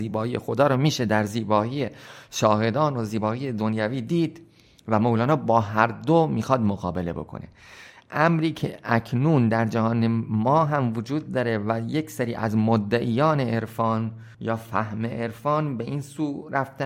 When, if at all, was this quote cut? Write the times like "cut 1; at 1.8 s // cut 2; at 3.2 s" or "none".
cut 1; at 14.3 s

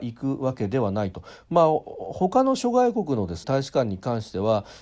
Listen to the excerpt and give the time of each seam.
cut 1; at 3.4 s

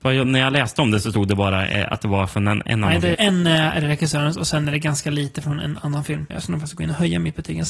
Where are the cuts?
cut 1; at 3.1 s // cut 2; at 6.3 s

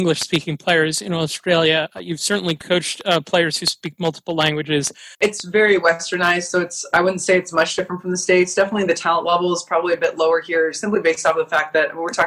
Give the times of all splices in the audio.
cut 1; at 5.1 s

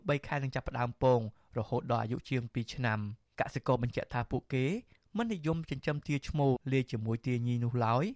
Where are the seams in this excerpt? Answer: cut 1; at 6.6 s

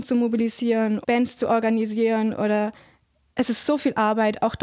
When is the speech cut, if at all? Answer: cut 1; at 1.0 s

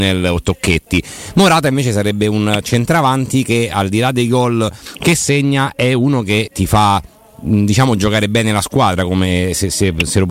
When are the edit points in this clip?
cut 1; at 6.5 s

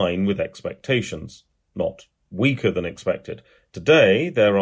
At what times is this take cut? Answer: cut 1; at 3.6 s

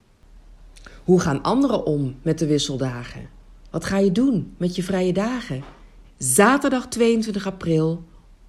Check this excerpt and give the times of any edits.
cut 1; at 3.7 s // cut 2; at 6.0 s

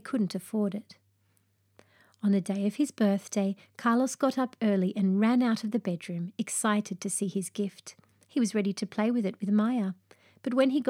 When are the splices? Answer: none

